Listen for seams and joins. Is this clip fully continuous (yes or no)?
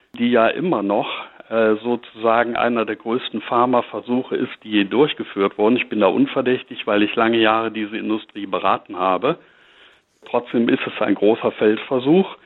yes